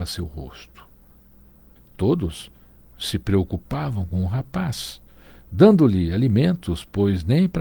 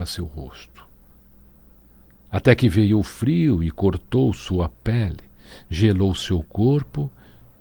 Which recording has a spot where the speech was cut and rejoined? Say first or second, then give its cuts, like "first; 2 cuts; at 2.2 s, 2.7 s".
first; 1 cut; at 1.8 s